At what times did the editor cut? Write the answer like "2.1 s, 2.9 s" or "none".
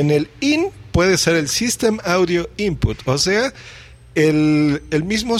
none